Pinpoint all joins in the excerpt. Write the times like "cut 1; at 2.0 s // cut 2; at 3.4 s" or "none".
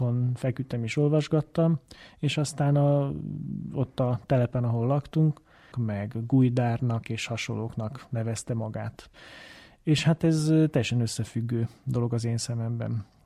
cut 1; at 5.7 s